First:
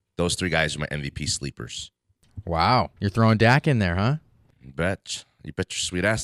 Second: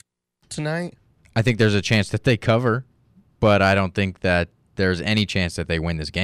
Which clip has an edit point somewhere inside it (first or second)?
first